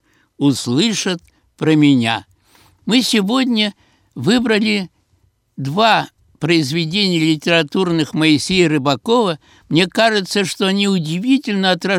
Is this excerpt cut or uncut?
cut